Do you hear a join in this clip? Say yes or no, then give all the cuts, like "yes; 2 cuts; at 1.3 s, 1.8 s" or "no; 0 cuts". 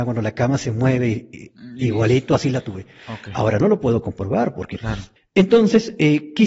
yes; 1 cut; at 5.2 s